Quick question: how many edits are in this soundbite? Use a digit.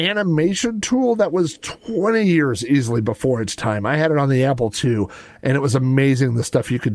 0